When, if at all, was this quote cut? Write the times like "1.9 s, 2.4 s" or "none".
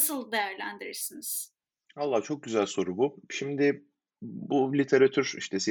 none